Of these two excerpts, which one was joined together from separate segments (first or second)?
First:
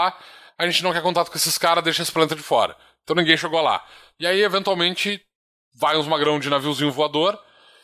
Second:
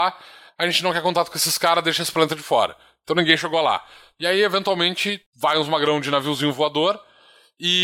second